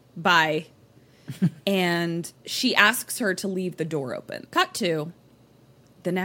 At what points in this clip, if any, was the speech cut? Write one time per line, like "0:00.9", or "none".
0:04.4